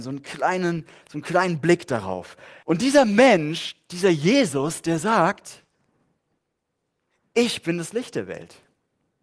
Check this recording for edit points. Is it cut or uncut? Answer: cut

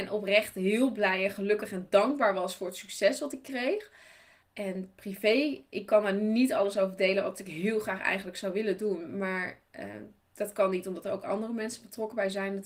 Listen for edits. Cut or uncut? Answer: cut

